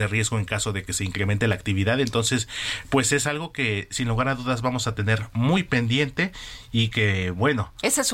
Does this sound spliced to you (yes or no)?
no